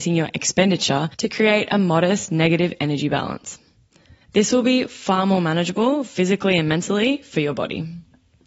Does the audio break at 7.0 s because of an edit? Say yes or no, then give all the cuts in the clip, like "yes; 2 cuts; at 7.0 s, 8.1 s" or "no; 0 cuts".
no; 1 cut; at 4.2 s